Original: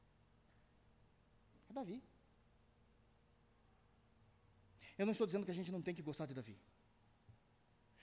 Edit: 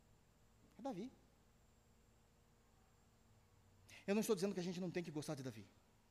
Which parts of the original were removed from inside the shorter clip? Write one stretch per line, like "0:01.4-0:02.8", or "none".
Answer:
none